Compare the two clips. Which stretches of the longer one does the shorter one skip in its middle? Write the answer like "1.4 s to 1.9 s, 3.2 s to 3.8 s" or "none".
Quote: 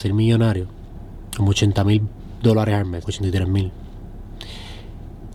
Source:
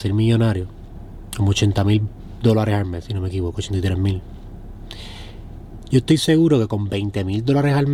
3.0 s to 3.5 s